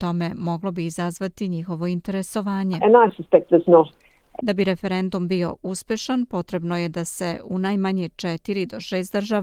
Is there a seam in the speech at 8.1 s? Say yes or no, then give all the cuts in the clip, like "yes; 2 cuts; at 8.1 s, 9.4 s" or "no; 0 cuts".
no; 1 cut; at 4.4 s